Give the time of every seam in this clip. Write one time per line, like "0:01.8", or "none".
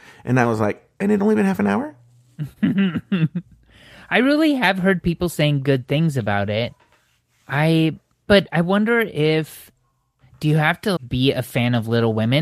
0:08.3
0:11.0